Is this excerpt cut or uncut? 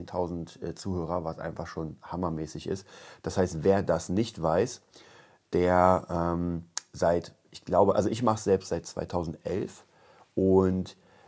uncut